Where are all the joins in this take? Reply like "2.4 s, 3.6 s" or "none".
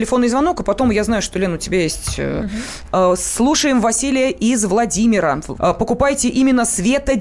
2.9 s, 5.6 s